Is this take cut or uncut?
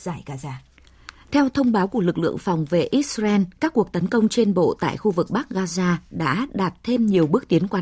uncut